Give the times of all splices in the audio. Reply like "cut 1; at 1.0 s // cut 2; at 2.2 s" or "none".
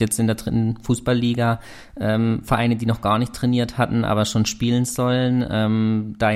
none

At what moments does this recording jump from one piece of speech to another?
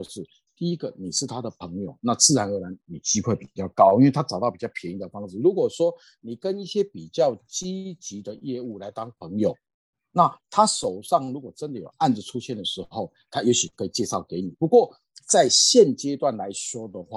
none

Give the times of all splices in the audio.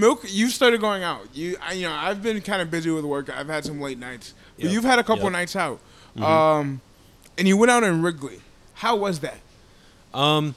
none

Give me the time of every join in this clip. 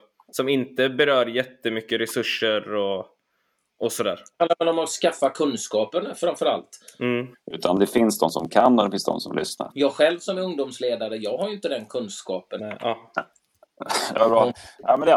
cut 1; at 7.3 s // cut 2; at 9.7 s // cut 3; at 12.6 s

